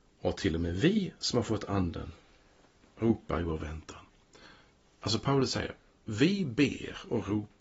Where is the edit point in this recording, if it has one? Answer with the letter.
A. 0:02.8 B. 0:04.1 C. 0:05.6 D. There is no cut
D